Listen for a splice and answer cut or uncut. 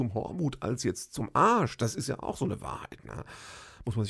uncut